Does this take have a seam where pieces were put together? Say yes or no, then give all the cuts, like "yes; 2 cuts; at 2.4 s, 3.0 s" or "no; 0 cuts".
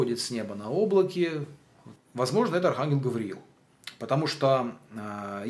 yes; 1 cut; at 2.0 s